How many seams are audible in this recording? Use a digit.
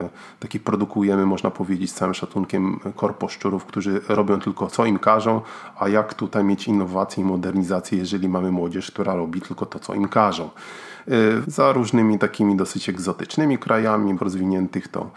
3